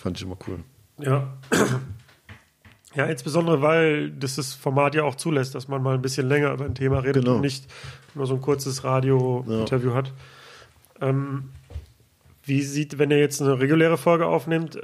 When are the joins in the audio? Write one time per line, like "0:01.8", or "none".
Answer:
none

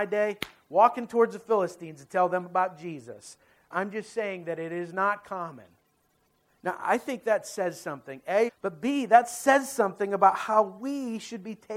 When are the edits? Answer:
0:03.7
0:06.5
0:08.5

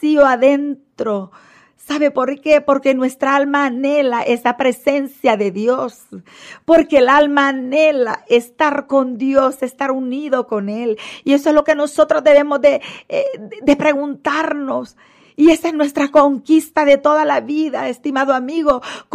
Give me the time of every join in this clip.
none

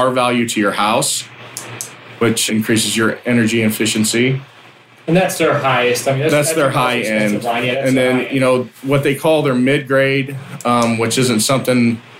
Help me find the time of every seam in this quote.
0:02.5

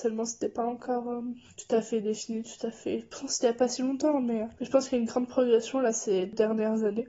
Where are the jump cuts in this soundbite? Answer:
none

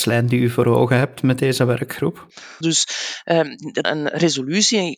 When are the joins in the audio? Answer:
0:02.6
0:03.8

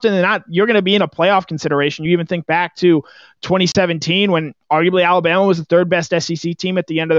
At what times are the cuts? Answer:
none

